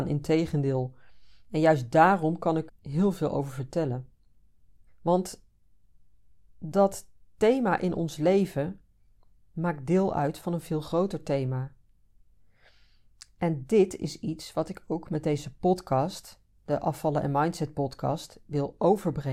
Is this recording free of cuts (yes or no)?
no